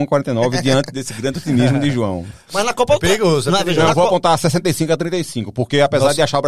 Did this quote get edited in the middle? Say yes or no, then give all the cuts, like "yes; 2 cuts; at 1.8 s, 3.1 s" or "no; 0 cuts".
no; 0 cuts